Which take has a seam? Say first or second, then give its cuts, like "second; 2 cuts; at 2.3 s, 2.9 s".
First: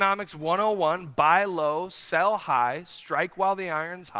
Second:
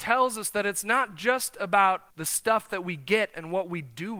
second; 1 cut; at 2.1 s